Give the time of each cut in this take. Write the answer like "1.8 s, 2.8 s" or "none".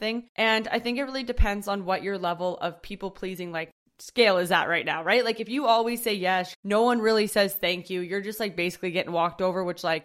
6.5 s